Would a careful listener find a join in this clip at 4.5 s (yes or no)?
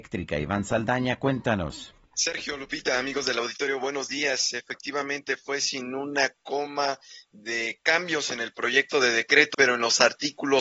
no